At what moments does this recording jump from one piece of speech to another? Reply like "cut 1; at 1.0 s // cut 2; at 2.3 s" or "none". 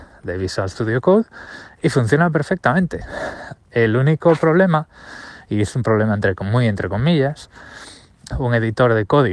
cut 1; at 8.3 s